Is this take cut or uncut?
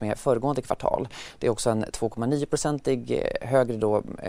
uncut